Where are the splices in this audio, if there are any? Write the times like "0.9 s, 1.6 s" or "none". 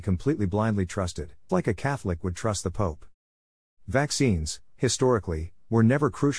1.5 s